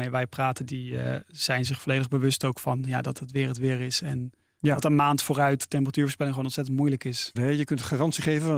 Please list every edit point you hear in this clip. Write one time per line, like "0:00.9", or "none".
0:07.4